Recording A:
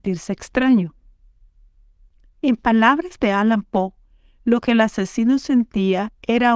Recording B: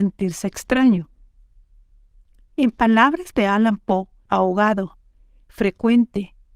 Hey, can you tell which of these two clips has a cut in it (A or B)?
B